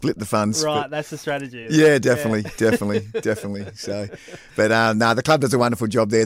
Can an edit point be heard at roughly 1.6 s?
no; 0 cuts

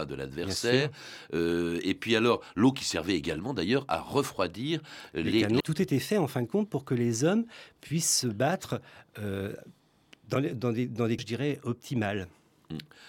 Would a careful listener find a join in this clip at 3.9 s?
no; 2 cuts; at 5.6 s, 11.2 s

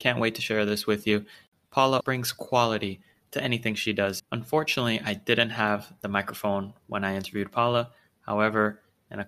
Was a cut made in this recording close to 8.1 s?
no; 2 cuts; at 2.0 s, 4.2 s

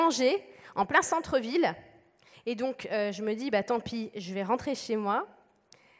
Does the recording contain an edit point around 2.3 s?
yes; 1 cut; at 2.3 s

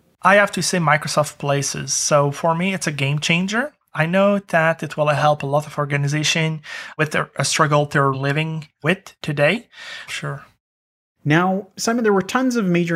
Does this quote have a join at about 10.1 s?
yes; 2 cuts; at 8.1 s, 10.1 s

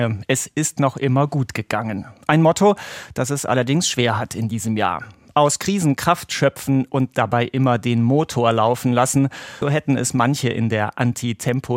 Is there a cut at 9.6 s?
yes; 1 cut; at 9.6 s

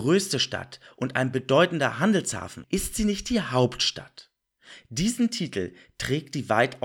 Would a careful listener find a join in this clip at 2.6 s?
yes; 1 cut; at 2.6 s

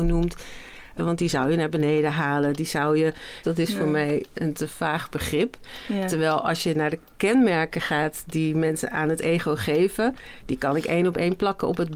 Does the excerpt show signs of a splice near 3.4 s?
yes; 2 cuts; at 1.0 s, 3.4 s

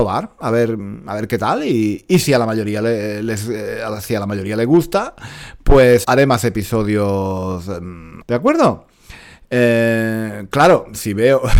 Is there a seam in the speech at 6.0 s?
yes; 2 cuts; at 6.0 s, 8.2 s

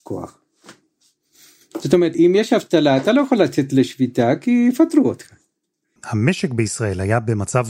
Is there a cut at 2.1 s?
yes; 2 cuts; at 2.1 s, 6.0 s

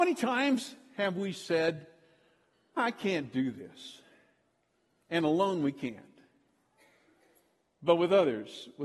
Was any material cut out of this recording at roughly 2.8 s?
yes; 1 cut; at 2.8 s

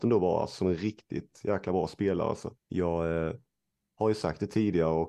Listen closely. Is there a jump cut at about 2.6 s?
yes; 1 cut; at 2.6 s

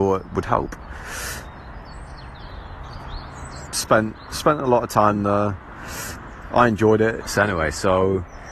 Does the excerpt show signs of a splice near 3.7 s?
yes; 2 cuts; at 3.7 s, 7.2 s

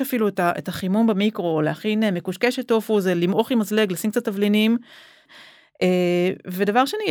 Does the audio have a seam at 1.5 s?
no; 1 cut; at 5.3 s

